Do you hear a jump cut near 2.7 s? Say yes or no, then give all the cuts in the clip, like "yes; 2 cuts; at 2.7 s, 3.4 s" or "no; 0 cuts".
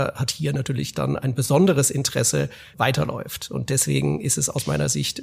yes; 1 cut; at 2.7 s